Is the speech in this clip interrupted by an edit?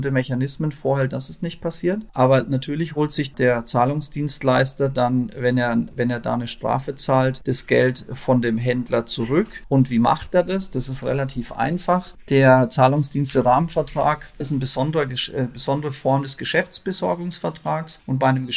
no; 0 cuts

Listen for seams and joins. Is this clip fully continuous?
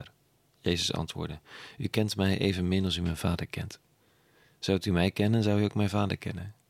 yes; 0 cuts

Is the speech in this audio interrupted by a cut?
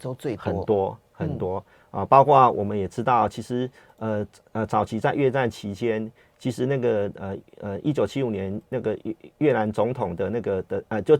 no; 0 cuts

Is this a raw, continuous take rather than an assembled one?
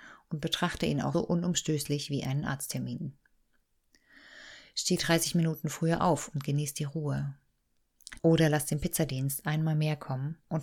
no; 2 cuts; at 1.1 s, 8.2 s

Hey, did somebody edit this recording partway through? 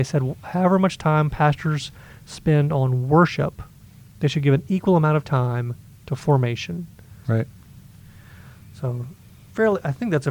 yes; 1 cut; at 7.2 s

